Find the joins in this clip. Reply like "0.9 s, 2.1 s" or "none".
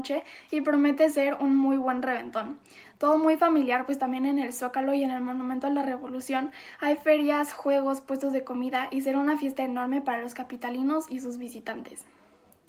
none

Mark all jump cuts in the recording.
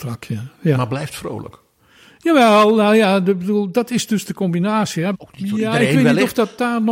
5.1 s

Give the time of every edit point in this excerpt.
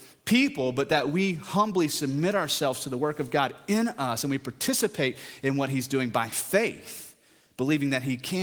none

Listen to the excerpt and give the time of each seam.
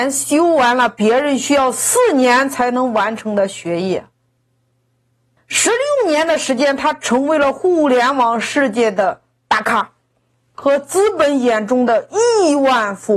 5.4 s

